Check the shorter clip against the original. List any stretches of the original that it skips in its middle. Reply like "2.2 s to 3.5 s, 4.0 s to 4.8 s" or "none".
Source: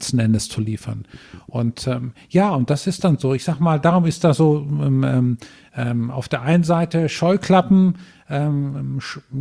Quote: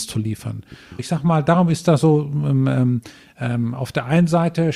1.4 s to 3.3 s